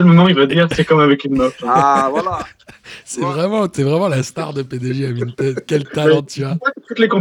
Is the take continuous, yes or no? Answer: yes